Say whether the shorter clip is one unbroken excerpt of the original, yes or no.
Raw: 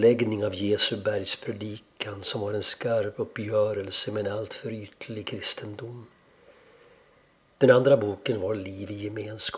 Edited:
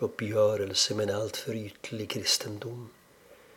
yes